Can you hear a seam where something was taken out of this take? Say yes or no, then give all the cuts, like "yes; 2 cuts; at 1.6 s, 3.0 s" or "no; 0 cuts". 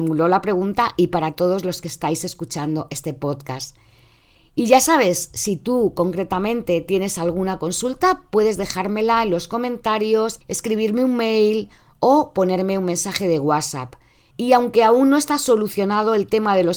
yes; 1 cut; at 14.3 s